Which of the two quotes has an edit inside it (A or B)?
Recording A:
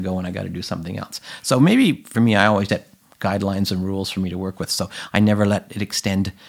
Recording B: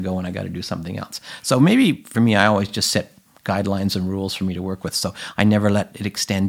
A